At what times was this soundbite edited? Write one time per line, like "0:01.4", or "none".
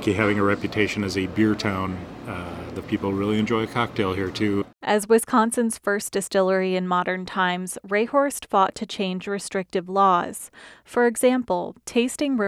0:02.8